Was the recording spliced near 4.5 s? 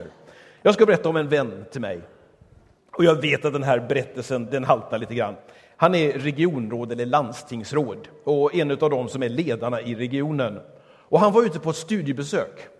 yes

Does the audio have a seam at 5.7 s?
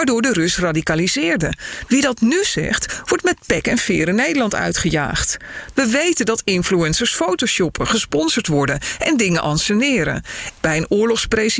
yes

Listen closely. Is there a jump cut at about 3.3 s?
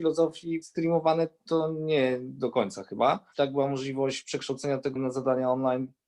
yes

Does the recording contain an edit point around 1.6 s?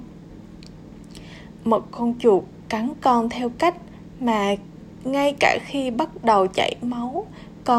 yes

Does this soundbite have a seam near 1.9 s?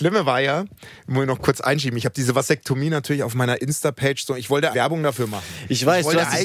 no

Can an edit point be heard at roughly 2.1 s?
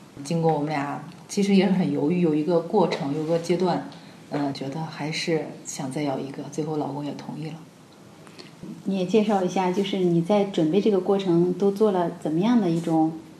no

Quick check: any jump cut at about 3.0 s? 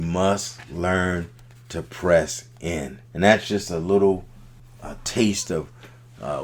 yes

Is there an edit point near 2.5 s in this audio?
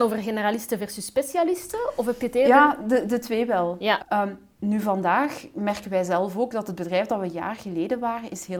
no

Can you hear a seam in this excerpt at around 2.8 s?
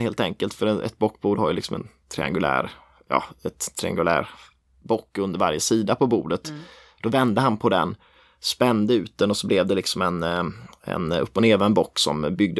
no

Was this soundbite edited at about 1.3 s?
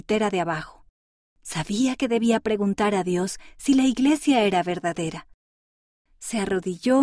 yes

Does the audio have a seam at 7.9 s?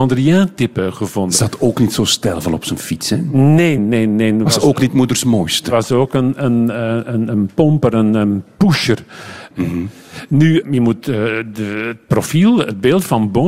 no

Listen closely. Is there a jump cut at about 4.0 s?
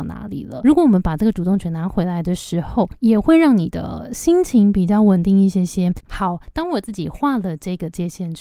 no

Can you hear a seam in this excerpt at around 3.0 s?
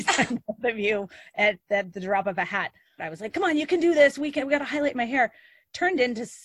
yes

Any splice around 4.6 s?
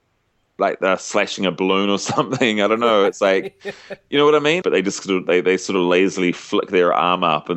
yes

